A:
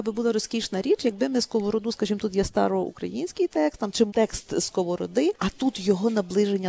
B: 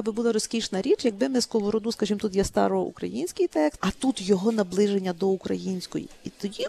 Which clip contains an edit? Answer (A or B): B